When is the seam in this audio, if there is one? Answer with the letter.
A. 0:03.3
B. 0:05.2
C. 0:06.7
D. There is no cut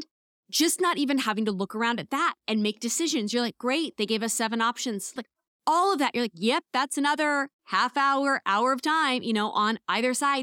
B